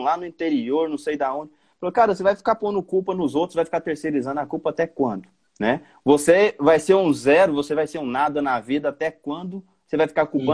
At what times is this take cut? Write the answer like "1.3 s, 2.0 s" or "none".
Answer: none